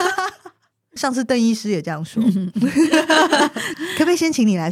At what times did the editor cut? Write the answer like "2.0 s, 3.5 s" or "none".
none